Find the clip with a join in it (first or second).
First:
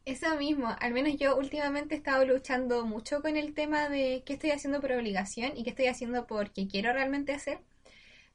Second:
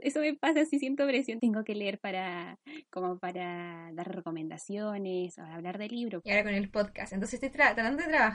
second